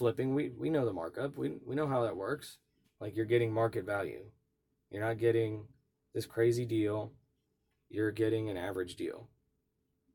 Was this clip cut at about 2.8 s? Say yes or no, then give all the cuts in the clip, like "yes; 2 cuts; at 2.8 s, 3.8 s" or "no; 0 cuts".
yes; 1 cut; at 2.8 s